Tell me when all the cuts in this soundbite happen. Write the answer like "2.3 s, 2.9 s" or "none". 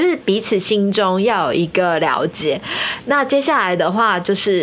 none